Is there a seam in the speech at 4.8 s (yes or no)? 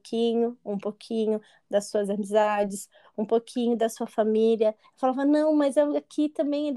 yes